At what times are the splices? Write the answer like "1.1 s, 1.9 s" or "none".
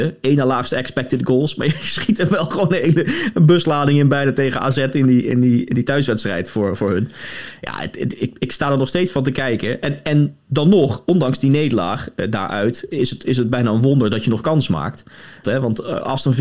15.4 s